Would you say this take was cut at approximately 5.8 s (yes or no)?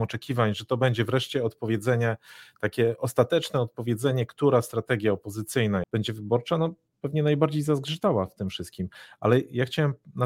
yes